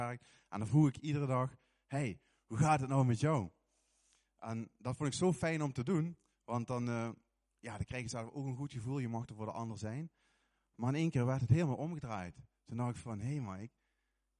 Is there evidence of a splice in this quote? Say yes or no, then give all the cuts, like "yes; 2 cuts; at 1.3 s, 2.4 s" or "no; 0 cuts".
no; 0 cuts